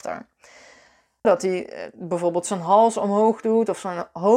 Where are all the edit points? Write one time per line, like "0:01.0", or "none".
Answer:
0:01.2